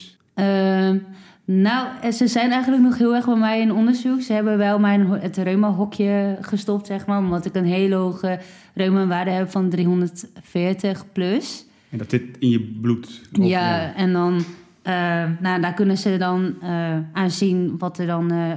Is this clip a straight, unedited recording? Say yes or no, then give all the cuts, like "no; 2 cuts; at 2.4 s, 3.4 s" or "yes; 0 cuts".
yes; 0 cuts